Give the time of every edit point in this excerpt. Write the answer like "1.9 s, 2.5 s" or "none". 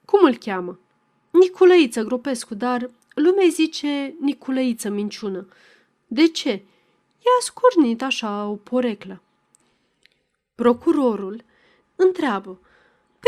11.8 s